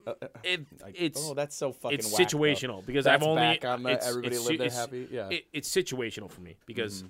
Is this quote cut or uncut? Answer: uncut